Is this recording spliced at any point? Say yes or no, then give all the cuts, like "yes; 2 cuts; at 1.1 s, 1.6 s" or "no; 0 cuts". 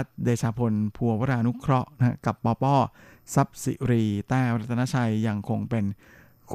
no; 0 cuts